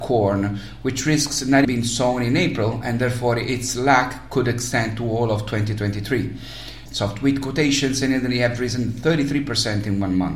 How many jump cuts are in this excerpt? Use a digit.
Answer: 2